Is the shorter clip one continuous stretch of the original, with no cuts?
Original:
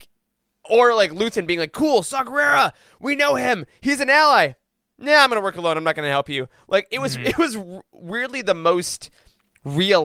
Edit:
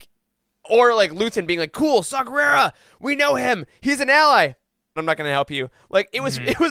no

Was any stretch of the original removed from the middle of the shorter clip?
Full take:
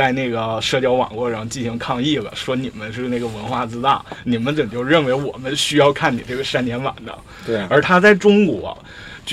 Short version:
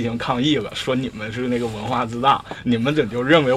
no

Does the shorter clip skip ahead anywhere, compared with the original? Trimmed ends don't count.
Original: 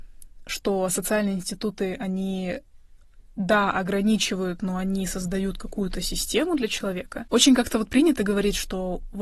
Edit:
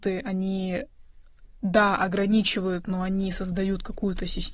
no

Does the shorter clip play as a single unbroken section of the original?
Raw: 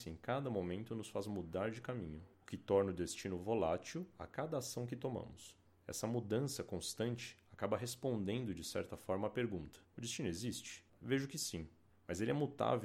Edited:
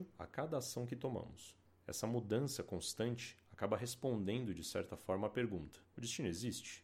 yes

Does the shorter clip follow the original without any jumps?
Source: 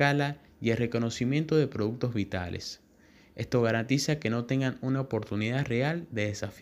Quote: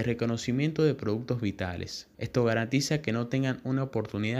no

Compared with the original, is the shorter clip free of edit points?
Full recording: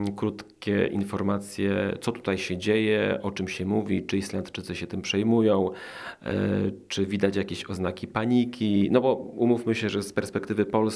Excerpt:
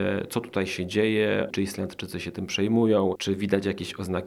no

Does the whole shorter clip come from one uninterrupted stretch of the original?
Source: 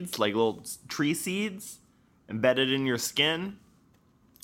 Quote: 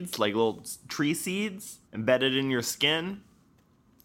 no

